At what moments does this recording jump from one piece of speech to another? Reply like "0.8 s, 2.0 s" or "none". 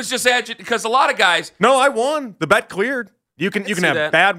3.4 s